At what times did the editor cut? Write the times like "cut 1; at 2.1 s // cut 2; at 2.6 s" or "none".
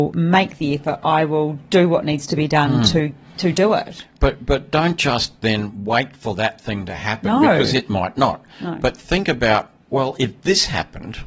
none